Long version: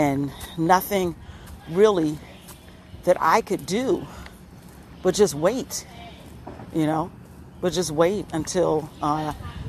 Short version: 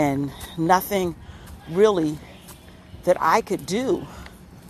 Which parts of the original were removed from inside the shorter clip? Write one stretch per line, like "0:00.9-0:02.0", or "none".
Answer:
none